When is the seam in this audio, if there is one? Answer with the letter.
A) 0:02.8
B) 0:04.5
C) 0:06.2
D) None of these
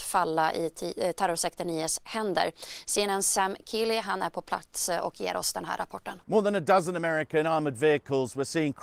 C